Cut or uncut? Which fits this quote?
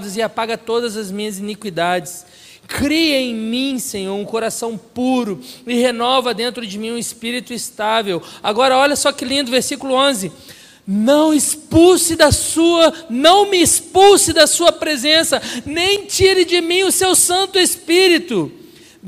uncut